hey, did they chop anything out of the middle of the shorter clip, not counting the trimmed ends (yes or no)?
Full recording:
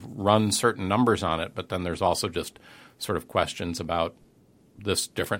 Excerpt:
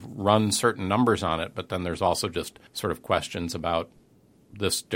yes